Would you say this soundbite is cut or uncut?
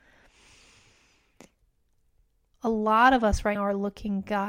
cut